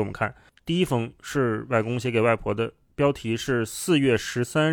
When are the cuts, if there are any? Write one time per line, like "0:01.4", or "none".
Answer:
none

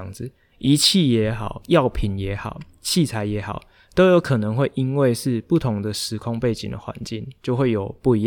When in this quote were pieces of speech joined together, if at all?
none

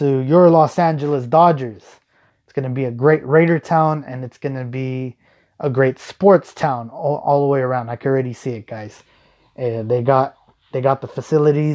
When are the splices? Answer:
0:02.3

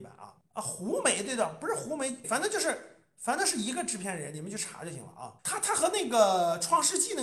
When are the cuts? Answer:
0:02.2
0:05.4

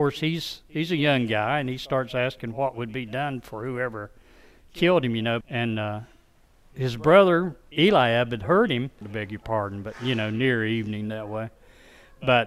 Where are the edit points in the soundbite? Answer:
0:05.4
0:09.0

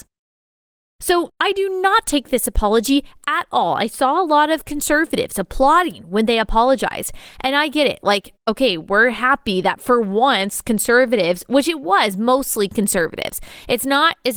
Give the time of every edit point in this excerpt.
0:01.3

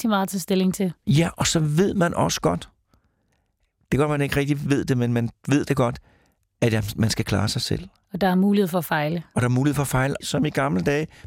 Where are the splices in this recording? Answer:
0:10.2

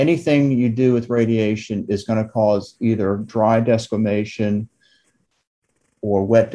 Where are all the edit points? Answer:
0:01.9

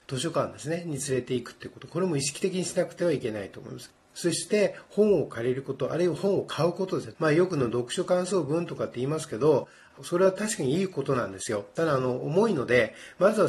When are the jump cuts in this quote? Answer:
0:07.1

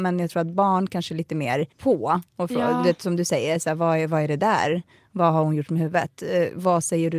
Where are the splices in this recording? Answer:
0:01.7

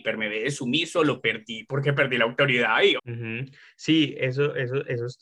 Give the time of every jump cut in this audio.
0:03.0

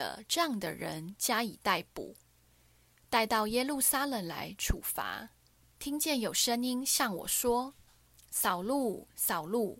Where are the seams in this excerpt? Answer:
0:05.6

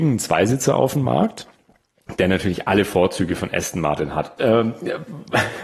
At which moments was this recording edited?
0:04.4

